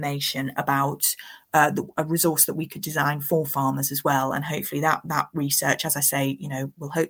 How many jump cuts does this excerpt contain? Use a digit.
0